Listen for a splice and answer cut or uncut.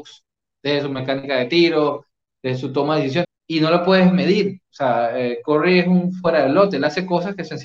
cut